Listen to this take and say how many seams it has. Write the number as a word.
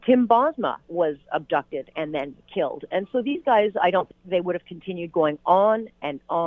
one